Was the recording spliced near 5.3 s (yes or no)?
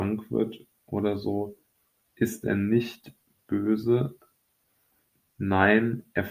yes